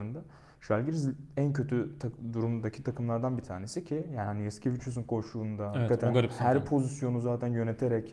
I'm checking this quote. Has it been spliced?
no; 0 cuts

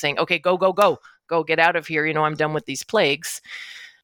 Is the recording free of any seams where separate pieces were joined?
yes; 0 cuts

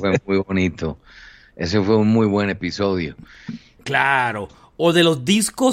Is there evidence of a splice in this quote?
yes; 1 cut; at 3.8 s

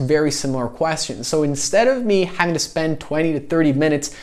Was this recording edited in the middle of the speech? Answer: no; 0 cuts

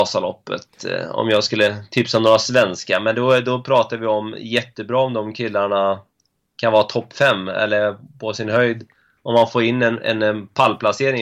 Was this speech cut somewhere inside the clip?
no; 0 cuts

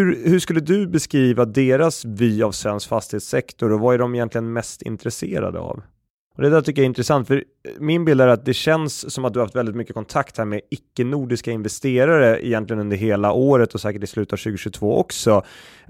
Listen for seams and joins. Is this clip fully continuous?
no; 1 cut; at 6.1 s

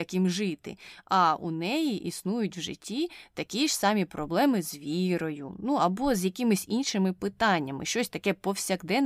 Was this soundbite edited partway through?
no; 0 cuts

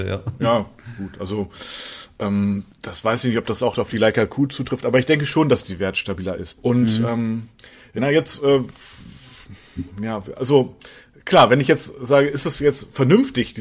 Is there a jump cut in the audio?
yes; 3 cuts; at 2.7 s, 6.6 s, 8.0 s

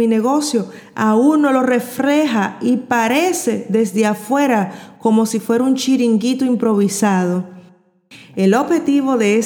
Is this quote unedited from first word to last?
yes; 0 cuts

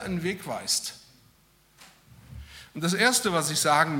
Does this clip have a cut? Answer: no; 0 cuts

